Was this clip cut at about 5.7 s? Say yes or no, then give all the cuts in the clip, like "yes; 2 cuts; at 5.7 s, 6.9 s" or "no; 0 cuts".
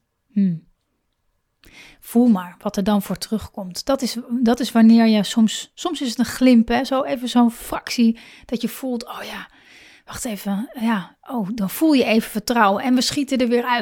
no; 0 cuts